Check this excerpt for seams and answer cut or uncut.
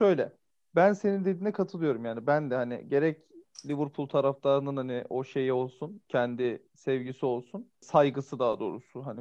uncut